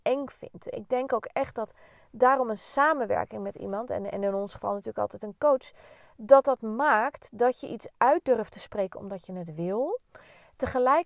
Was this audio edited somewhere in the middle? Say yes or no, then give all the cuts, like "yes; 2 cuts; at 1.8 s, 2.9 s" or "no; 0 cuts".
no; 0 cuts